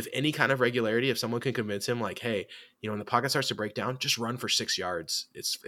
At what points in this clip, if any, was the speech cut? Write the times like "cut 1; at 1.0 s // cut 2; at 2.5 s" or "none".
none